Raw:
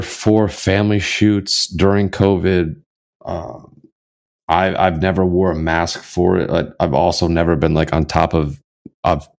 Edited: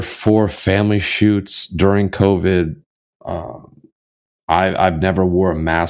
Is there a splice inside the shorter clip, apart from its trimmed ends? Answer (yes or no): no